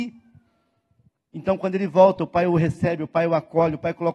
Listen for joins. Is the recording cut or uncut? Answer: uncut